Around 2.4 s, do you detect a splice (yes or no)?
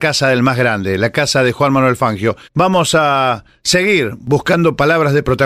yes